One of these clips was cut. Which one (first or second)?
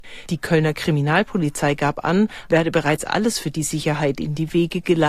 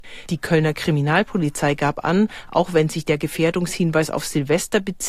first